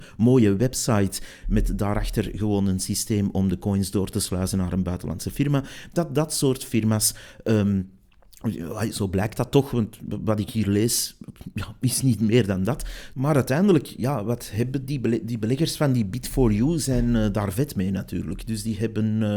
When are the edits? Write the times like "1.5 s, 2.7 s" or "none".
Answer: 13.1 s

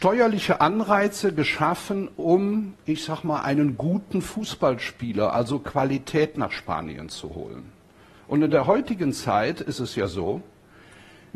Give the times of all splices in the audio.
none

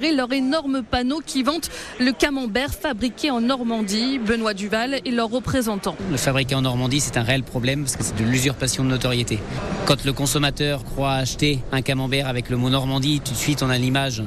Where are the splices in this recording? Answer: none

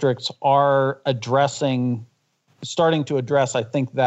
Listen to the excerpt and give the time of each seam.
none

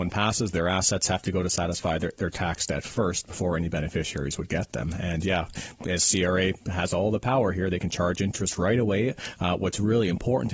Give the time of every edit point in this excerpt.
5.8 s

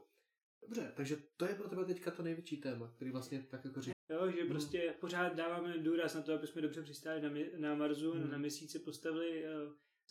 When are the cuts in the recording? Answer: 3.9 s

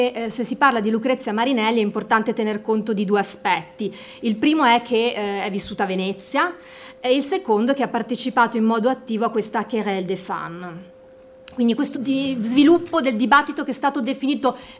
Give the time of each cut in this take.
11.9 s

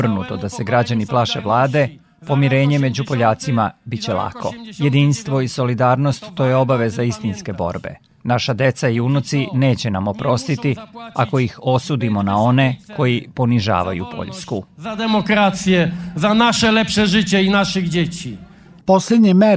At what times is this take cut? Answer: none

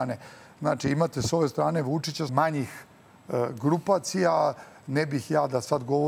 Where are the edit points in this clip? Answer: 2.3 s

